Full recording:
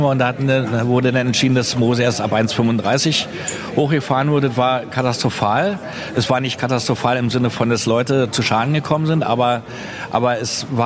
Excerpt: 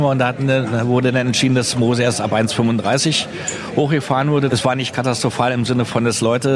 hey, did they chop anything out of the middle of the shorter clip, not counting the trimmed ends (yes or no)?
yes